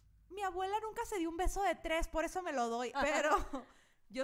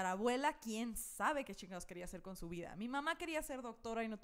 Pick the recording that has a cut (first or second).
first